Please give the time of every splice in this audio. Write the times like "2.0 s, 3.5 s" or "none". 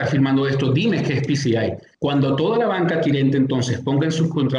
1.9 s